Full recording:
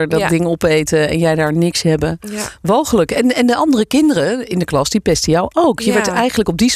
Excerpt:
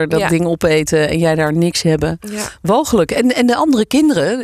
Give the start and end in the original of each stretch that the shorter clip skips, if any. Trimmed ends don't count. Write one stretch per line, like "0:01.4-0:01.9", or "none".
none